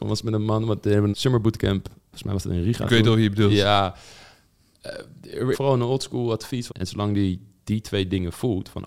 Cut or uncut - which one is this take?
cut